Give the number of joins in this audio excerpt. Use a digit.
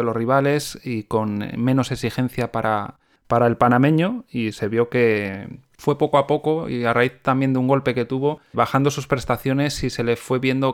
2